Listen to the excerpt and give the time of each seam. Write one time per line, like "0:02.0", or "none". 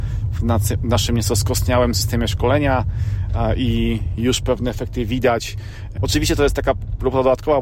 0:06.0